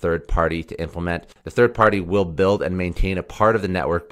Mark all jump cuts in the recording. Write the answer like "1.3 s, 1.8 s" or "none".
none

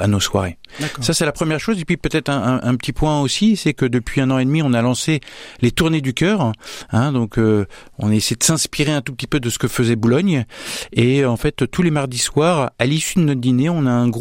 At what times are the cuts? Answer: none

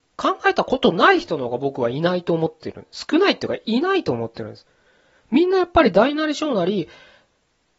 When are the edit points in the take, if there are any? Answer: none

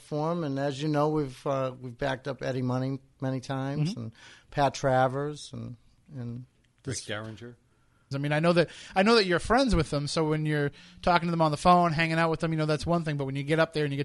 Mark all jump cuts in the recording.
8.1 s

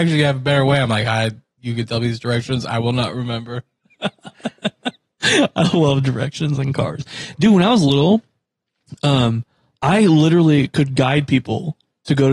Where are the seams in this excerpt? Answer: none

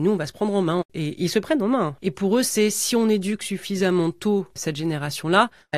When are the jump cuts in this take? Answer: 2.0 s

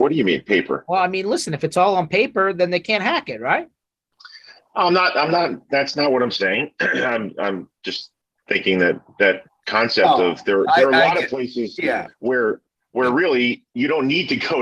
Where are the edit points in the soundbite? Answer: none

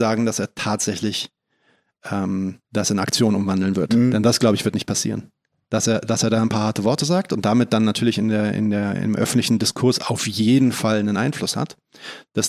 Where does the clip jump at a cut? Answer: 2.6 s

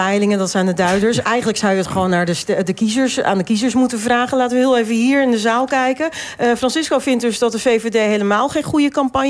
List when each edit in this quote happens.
none

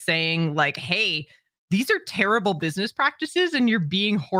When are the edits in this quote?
none

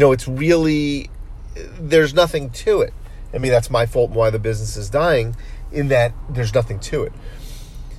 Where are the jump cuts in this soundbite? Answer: 3.4 s

